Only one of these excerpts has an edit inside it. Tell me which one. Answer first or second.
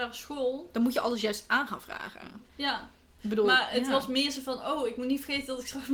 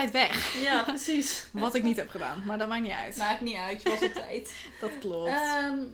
first